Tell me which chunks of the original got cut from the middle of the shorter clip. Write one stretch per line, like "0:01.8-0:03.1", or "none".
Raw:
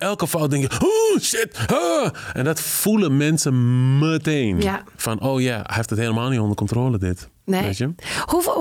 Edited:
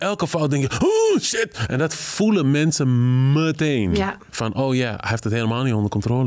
0:01.7-0:02.3